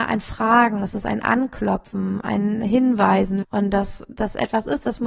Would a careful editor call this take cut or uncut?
cut